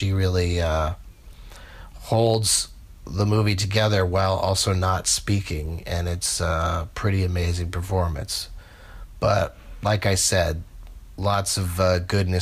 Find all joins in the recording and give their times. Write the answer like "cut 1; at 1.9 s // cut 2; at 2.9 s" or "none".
none